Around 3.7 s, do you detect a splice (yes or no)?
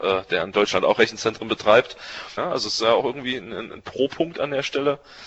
no